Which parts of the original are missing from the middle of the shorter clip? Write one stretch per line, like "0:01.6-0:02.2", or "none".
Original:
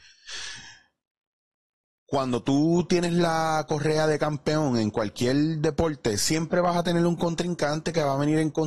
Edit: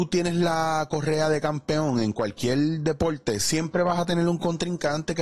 none